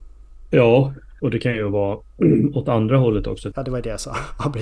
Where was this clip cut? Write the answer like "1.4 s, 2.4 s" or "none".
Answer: 1.2 s, 3.5 s